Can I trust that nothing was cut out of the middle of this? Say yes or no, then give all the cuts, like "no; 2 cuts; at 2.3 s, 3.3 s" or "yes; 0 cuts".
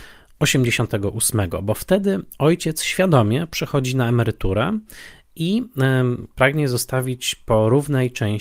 yes; 0 cuts